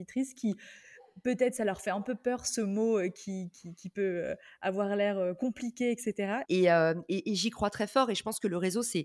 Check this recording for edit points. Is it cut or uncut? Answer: cut